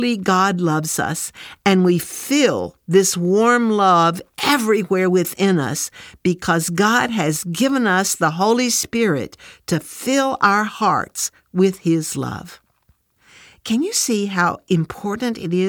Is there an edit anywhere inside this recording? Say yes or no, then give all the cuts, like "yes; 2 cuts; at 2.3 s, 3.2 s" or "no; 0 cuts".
no; 0 cuts